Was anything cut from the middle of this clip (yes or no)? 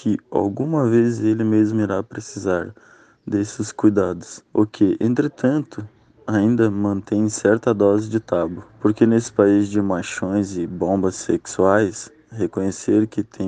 yes